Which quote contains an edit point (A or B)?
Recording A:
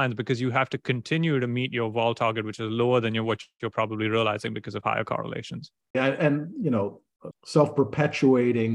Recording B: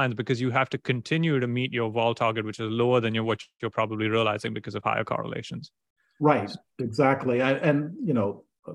A